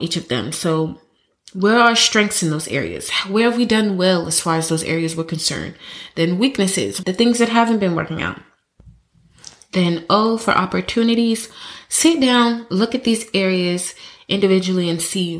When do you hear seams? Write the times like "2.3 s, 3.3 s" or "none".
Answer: 7.0 s